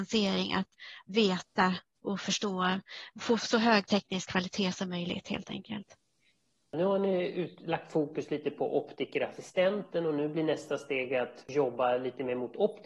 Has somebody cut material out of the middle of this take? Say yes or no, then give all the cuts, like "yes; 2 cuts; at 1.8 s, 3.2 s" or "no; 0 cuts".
yes; 1 cut; at 3.4 s